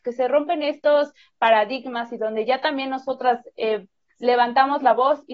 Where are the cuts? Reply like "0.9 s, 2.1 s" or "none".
none